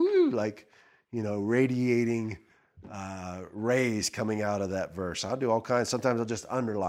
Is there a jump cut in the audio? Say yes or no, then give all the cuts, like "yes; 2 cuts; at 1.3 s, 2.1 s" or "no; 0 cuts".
no; 0 cuts